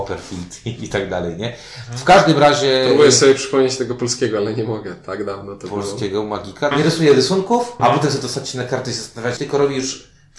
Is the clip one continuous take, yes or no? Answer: no